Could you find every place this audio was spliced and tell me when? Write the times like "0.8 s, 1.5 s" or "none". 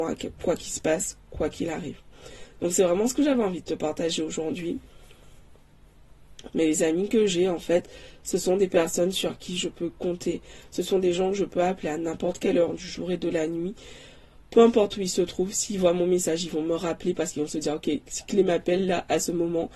6.5 s